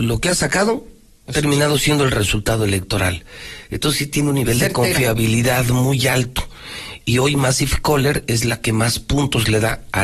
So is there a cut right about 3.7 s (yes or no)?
no